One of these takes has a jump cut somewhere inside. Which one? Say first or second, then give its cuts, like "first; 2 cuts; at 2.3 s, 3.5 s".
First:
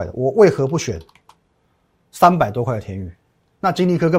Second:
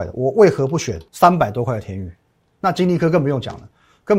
second; 1 cut; at 1.1 s